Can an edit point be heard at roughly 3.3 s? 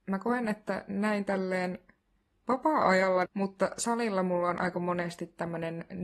yes; 1 cut; at 3.3 s

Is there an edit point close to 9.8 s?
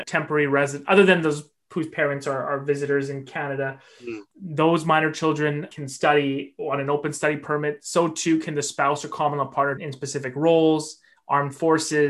yes; 1 cut; at 9.8 s

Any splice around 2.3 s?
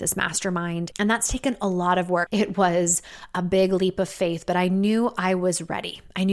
yes; 2 cuts; at 0.9 s, 2.3 s

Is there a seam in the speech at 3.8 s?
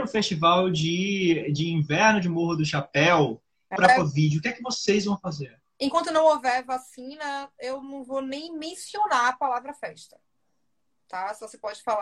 yes; 1 cut; at 3.8 s

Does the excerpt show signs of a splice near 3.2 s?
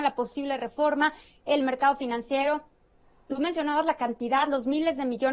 no; 0 cuts

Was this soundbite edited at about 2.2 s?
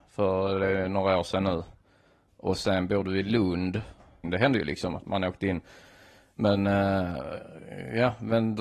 no; 1 cut; at 4.2 s

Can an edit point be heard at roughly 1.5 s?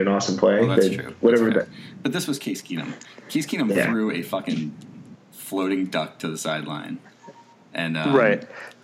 no; 0 cuts

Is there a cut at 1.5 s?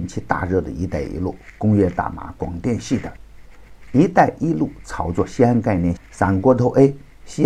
no; 1 cut; at 6.0 s

